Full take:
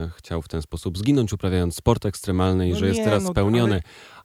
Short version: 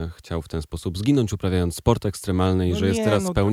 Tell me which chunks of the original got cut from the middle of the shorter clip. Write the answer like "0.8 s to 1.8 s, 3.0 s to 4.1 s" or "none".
none